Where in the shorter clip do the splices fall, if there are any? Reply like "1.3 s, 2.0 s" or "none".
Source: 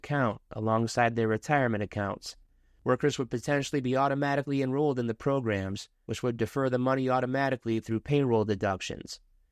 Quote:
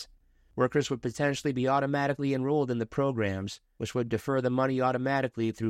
none